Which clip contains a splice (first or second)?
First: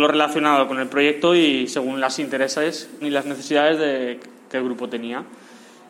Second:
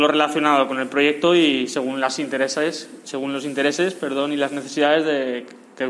first